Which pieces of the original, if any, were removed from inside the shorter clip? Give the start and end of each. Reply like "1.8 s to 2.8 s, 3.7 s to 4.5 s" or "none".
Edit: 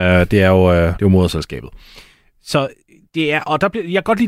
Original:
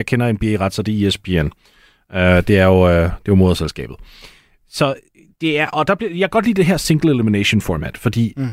3.1 s to 3.2 s